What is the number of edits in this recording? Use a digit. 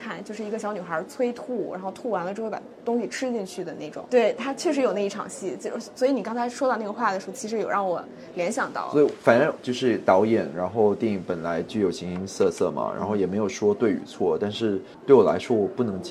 0